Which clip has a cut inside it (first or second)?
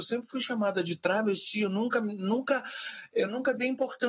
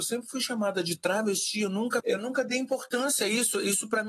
second